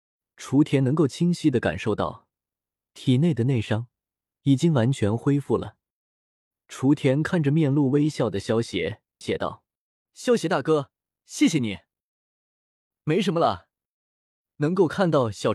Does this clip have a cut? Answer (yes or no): yes